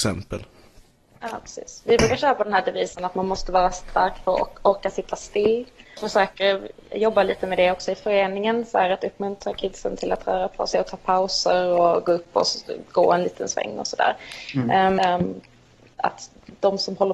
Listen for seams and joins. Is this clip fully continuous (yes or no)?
no